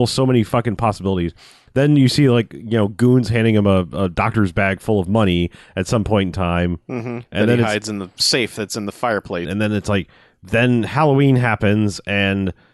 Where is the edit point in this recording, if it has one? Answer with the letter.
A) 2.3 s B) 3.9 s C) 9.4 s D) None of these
C